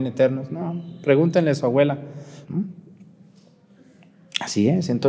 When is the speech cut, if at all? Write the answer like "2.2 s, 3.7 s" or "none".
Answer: 2.4 s